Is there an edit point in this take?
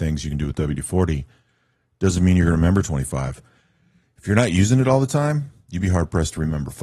no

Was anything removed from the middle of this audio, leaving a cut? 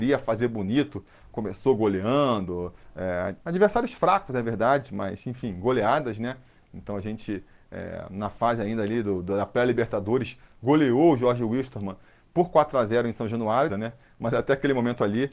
yes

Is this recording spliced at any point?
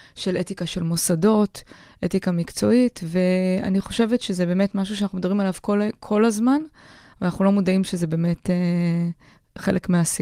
no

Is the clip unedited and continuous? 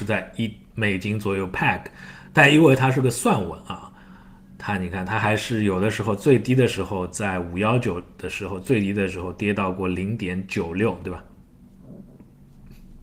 yes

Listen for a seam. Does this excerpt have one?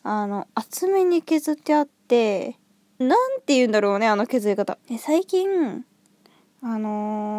yes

